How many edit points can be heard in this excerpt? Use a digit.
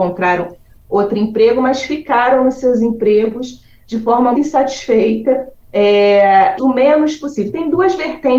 2